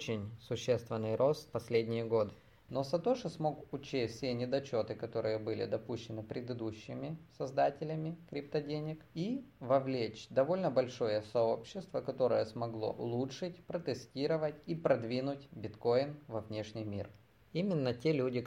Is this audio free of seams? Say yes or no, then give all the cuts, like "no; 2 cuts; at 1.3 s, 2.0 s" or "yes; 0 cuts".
no; 1 cut; at 2.7 s